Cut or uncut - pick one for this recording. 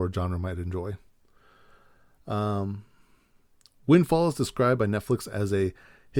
uncut